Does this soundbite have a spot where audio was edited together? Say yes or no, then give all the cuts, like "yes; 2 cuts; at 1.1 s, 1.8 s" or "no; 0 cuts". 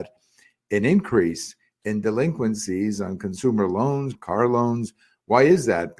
yes; 1 cut; at 4.2 s